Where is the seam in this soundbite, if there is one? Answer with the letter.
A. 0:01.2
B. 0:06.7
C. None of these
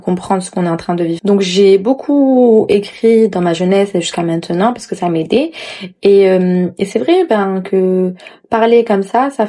A